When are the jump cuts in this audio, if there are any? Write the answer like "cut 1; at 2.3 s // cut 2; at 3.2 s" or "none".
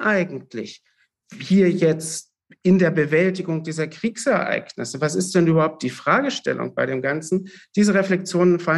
none